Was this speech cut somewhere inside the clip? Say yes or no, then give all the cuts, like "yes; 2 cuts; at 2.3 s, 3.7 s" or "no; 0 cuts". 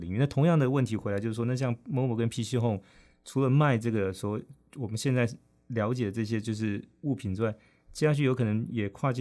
no; 0 cuts